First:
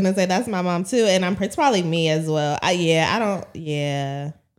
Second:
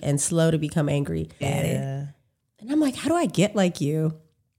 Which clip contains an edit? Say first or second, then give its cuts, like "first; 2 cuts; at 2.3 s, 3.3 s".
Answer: second; 1 cut; at 1.4 s